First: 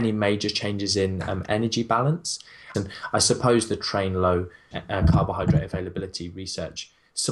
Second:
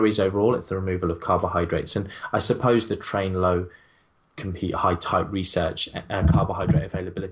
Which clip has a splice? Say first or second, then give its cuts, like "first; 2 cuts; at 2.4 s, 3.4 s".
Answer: first; 2 cuts; at 2.7 s, 4.7 s